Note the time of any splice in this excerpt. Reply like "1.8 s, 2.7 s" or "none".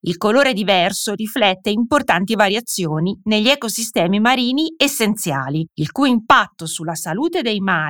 none